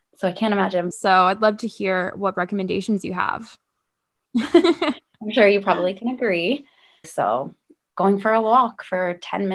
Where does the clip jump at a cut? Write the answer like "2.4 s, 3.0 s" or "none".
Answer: 0.9 s, 4.3 s, 7.0 s

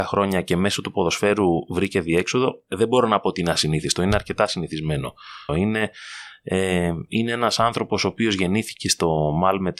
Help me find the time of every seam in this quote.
5.5 s

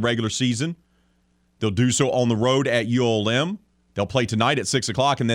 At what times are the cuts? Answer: none

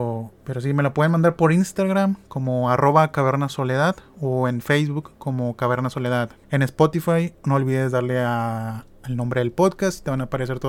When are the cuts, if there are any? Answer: 6.4 s

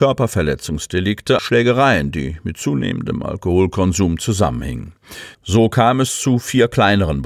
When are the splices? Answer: 1.4 s, 5.3 s

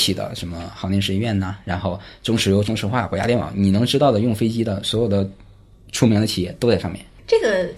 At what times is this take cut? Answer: none

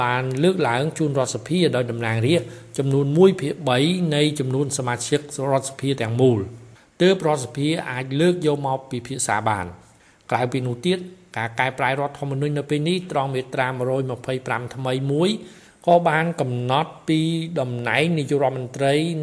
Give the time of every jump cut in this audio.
none

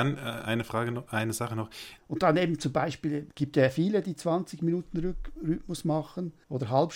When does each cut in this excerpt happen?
2.0 s

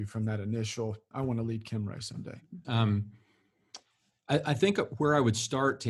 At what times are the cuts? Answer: 1.1 s, 2.6 s

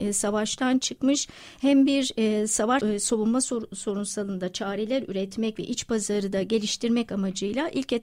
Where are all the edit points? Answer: 2.8 s

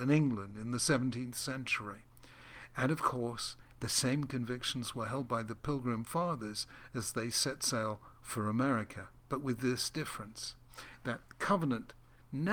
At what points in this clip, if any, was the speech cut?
8.1 s

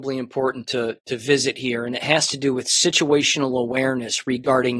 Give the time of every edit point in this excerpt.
none

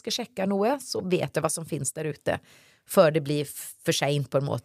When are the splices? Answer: none

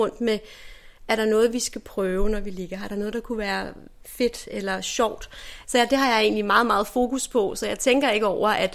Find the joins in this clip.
5.6 s

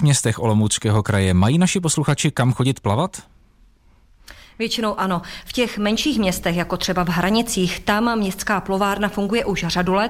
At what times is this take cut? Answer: none

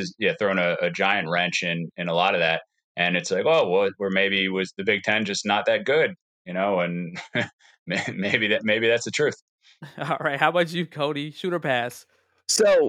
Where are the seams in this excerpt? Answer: none

